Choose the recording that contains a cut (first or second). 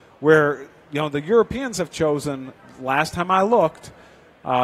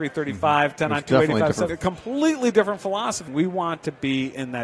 second